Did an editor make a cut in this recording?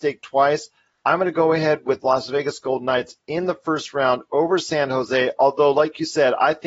no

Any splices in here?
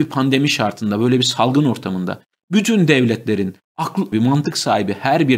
yes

